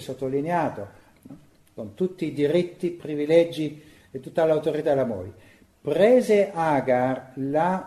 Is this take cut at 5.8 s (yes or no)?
no